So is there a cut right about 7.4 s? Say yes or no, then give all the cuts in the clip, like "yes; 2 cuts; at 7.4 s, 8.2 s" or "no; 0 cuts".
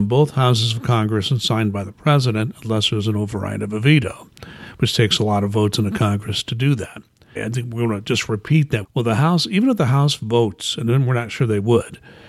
yes; 2 cuts; at 7.4 s, 8.8 s